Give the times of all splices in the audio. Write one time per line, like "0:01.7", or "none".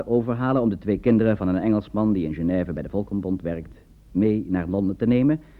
none